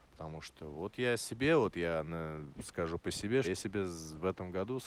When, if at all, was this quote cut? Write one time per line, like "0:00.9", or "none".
0:03.4